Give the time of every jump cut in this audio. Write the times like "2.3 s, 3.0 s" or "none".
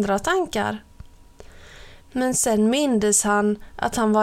2.0 s